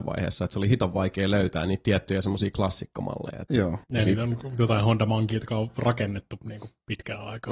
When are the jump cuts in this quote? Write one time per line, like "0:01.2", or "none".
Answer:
0:03.8